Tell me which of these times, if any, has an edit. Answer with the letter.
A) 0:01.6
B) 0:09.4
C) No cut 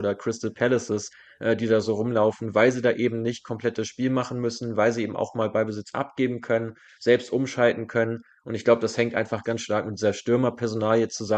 B